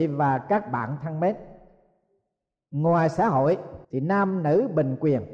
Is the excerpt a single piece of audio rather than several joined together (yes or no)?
no